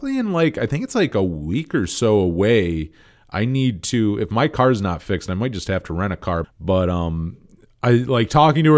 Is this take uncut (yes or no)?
no